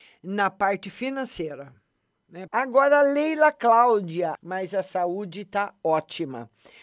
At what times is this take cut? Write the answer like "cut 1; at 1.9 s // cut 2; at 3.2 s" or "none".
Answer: cut 1; at 2.5 s // cut 2; at 4.4 s